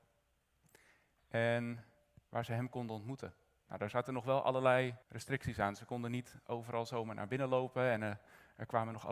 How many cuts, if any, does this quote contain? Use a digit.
1